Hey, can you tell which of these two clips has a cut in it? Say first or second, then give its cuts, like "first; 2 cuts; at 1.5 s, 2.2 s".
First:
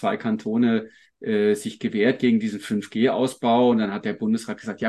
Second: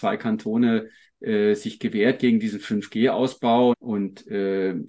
second; 1 cut; at 3.7 s